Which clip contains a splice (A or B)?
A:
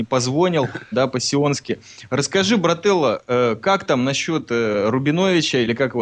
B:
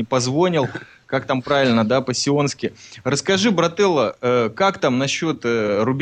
A